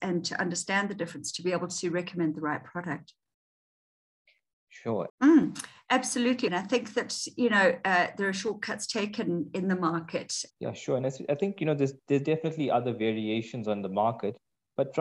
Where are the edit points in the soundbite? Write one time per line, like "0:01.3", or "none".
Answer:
0:05.1
0:06.5
0:10.5